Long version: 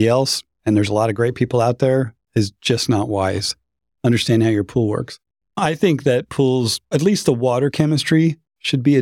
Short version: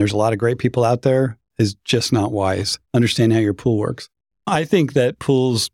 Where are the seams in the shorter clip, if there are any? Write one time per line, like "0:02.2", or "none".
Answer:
0:02.9